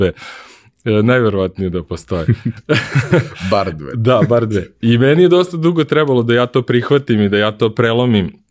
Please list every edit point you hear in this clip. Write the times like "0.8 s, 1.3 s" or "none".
none